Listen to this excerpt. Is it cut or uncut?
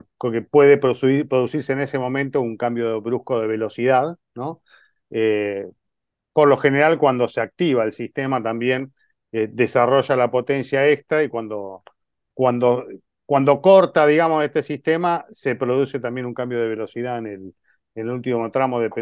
uncut